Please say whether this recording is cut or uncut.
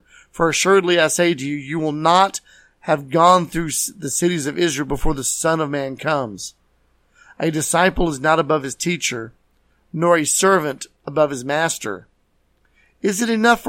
uncut